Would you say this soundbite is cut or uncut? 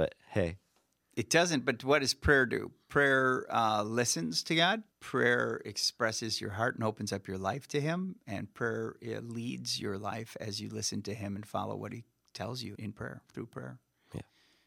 cut